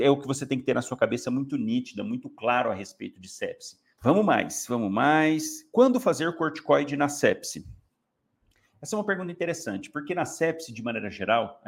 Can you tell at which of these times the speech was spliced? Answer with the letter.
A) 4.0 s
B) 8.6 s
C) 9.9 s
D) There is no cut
A